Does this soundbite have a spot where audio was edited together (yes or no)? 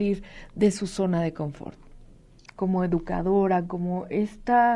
yes